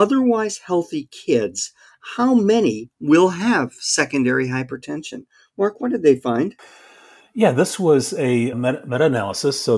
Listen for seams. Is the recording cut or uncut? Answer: cut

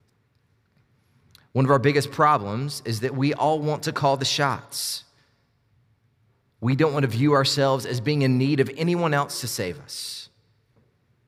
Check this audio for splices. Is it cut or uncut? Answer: uncut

